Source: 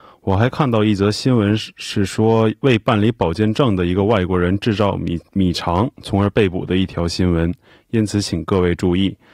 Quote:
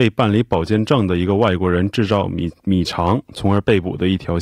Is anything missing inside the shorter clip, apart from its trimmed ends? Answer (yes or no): no